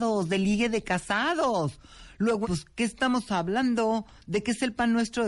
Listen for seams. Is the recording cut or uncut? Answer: cut